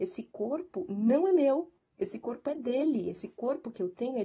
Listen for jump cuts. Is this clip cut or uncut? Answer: uncut